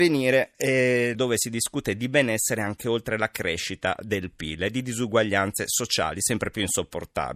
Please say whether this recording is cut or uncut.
cut